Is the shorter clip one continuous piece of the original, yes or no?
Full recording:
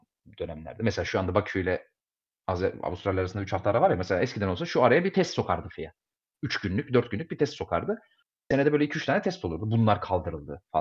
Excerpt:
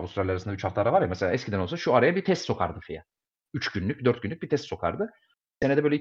yes